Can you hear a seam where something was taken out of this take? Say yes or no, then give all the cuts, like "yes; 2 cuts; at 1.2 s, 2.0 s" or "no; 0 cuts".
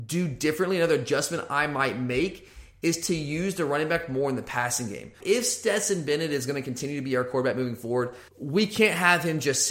yes; 2 cuts; at 5.2 s, 8.3 s